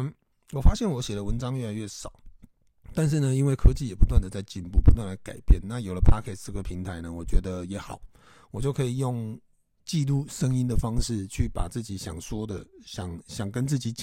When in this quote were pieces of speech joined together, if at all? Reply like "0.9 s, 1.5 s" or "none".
none

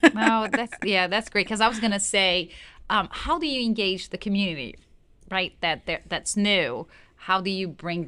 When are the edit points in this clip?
none

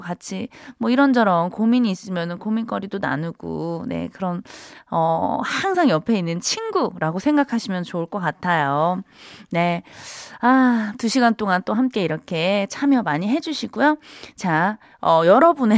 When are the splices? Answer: none

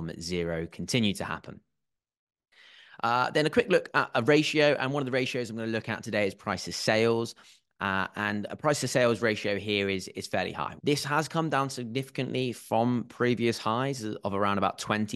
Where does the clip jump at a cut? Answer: 10.8 s

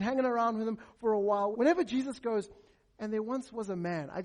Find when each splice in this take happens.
1.5 s

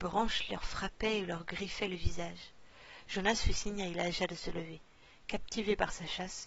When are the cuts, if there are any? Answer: 3.1 s

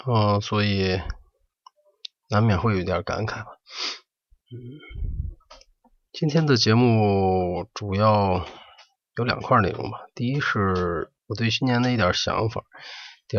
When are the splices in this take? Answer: none

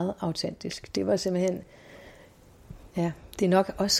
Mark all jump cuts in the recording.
none

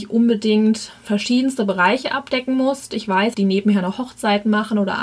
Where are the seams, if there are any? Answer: 3.3 s

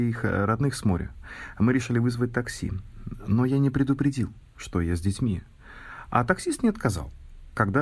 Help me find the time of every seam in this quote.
none

